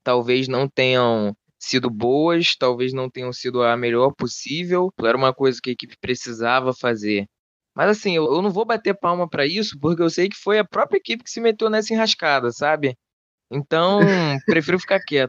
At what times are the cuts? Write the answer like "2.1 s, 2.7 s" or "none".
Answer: 5.0 s